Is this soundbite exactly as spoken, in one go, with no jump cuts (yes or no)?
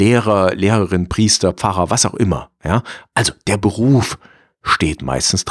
yes